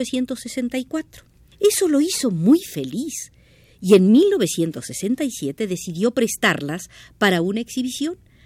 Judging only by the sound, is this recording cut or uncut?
cut